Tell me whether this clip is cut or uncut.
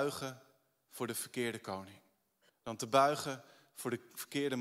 cut